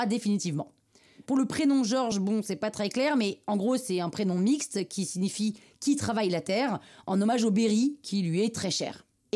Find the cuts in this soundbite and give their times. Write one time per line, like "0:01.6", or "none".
none